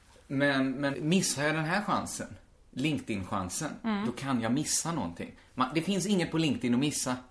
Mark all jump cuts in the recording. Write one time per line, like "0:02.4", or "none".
0:00.9